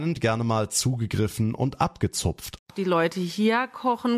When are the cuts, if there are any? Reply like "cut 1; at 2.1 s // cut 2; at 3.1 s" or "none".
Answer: cut 1; at 2.6 s